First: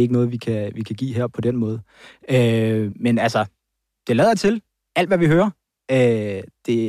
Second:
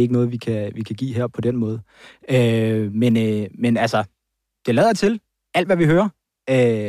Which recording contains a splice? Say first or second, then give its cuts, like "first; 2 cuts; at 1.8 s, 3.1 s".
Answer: first; 1 cut; at 2.9 s